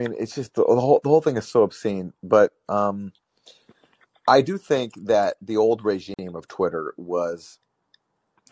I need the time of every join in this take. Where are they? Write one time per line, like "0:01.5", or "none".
none